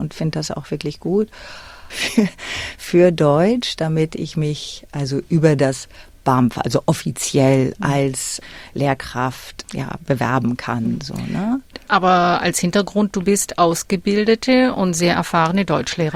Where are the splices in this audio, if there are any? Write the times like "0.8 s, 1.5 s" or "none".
1.9 s